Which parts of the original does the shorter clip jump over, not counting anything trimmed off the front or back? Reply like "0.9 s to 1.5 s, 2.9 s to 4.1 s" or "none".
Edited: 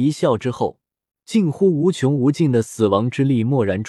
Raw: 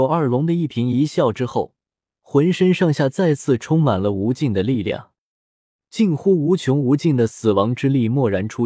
2.1 s to 5.8 s